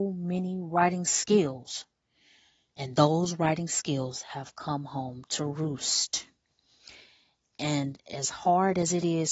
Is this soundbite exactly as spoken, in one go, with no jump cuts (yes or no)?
yes